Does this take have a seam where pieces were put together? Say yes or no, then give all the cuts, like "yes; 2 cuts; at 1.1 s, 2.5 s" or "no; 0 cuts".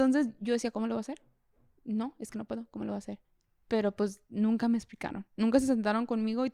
no; 0 cuts